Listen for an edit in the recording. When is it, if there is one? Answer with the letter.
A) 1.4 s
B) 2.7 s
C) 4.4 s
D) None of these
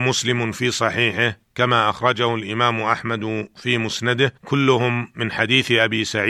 C